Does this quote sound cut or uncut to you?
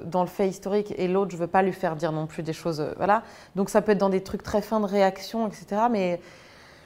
uncut